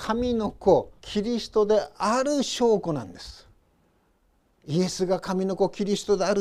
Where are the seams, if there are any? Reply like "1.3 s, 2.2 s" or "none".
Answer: 1.0 s